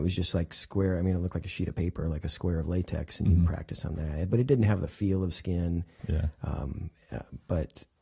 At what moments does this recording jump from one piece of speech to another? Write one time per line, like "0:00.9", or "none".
0:06.0